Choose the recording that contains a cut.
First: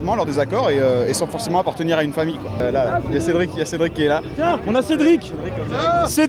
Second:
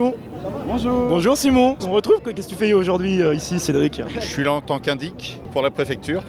second; 1 cut; at 1.8 s

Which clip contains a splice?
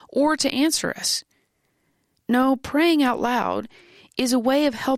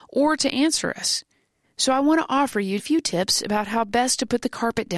second; 2 cuts; at 1.6 s, 2.8 s

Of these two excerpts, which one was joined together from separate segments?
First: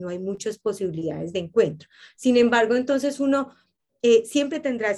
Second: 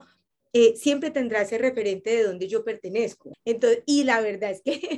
second; 1 cut; at 3.3 s

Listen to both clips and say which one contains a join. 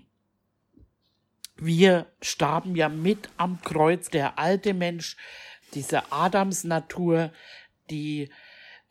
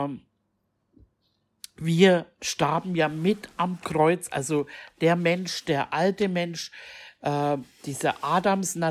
first; 2 cuts; at 4.1 s, 5.6 s

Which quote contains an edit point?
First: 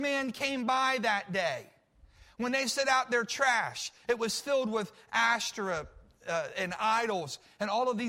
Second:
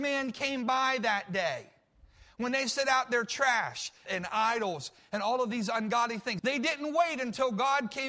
second; 2 cuts; at 4.1 s, 6.4 s

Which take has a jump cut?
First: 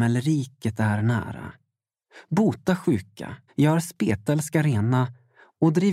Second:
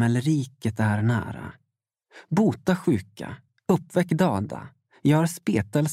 first; 1 cut; at 3.5 s

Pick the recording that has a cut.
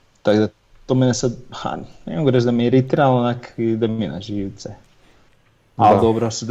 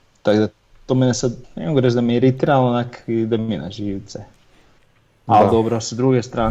second; 1 cut; at 1.4 s

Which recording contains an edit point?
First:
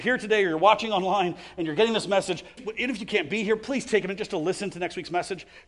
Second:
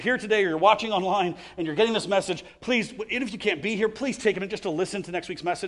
first; 1 cut; at 2.6 s

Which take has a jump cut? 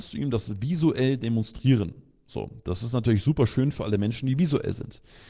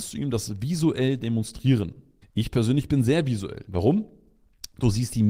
second; 2 cuts; at 2.2 s, 3.7 s

